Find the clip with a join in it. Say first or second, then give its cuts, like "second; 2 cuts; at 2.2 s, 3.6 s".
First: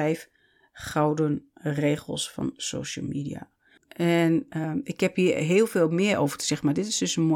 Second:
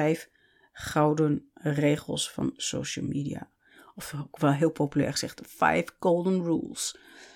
first; 1 cut; at 3.8 s